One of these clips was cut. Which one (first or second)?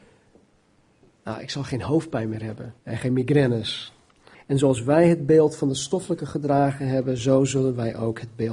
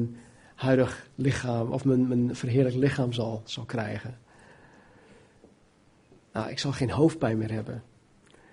first